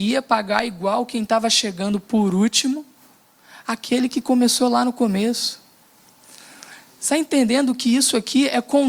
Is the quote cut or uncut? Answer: uncut